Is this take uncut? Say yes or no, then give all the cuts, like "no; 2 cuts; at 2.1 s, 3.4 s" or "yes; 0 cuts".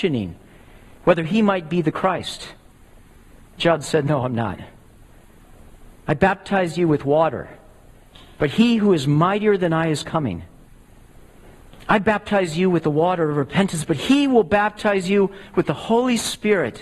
yes; 0 cuts